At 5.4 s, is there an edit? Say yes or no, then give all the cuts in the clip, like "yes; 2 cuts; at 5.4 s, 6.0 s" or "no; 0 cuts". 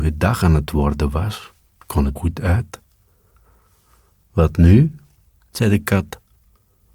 no; 1 cut; at 2.2 s